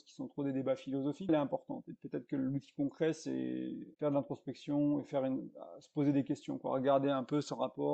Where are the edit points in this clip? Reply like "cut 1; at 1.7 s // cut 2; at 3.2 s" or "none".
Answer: cut 1; at 1.3 s // cut 2; at 3.9 s